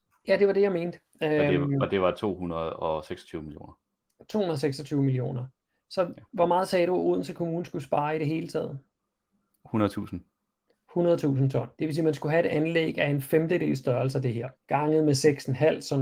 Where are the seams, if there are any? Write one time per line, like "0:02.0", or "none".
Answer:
0:09.5
0:11.7
0:14.5

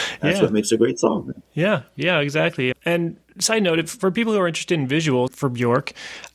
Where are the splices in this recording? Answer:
0:02.7
0:05.3

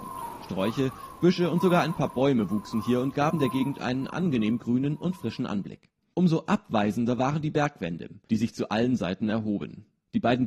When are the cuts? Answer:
none

